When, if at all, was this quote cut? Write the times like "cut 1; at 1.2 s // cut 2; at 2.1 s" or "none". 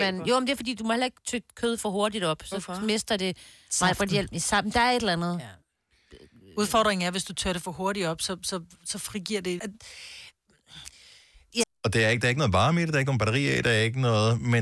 cut 1; at 9.6 s // cut 2; at 11.6 s